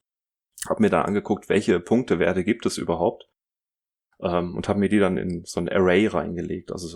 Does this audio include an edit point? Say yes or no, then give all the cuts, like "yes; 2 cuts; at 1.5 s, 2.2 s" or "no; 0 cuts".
no; 0 cuts